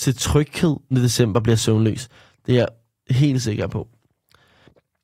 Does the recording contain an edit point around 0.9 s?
yes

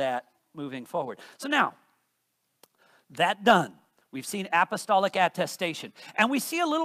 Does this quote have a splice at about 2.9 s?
no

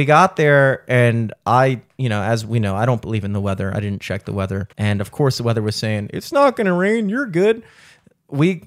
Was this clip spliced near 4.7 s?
yes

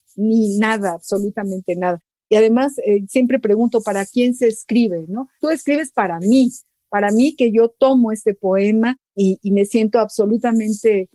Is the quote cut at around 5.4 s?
yes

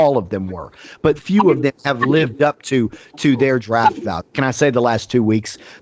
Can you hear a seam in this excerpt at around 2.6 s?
no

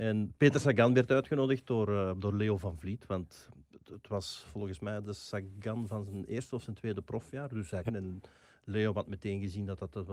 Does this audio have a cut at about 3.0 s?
no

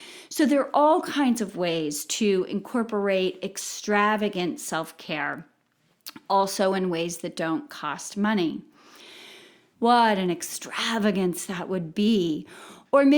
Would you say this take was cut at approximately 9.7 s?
yes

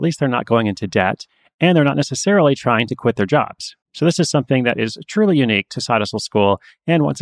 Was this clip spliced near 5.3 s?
no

